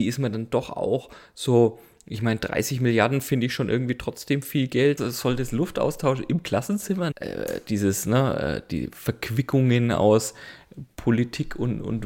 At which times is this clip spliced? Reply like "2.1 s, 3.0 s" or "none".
5.0 s, 7.1 s

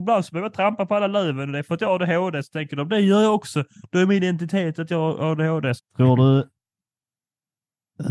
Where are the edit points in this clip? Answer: 5.8 s

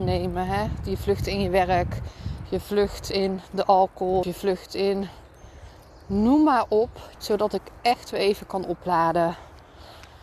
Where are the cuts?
4.2 s, 7.1 s

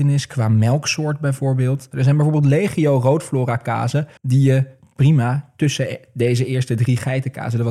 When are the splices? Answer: 1.9 s, 4.2 s

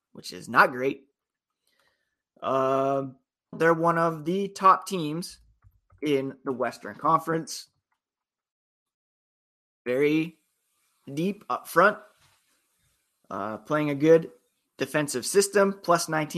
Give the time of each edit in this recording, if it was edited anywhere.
3.5 s

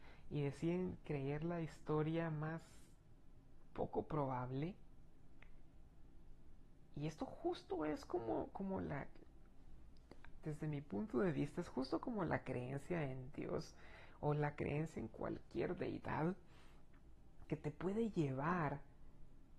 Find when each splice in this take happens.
none

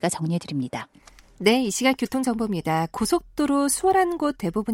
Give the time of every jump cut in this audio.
none

